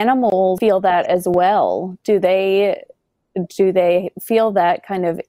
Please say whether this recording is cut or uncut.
uncut